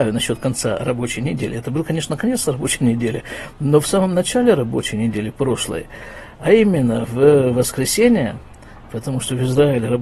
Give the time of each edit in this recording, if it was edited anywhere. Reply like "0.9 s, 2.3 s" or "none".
none